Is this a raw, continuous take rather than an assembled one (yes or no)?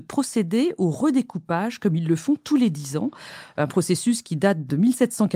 yes